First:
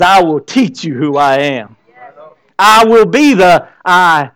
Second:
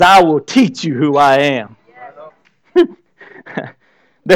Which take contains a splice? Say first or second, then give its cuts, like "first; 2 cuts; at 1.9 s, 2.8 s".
second; 1 cut; at 2.3 s